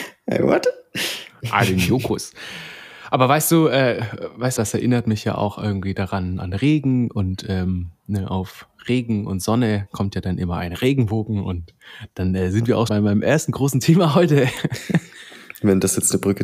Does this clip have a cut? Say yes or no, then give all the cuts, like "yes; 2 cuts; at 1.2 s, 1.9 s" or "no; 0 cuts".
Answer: yes; 2 cuts; at 4.6 s, 12.9 s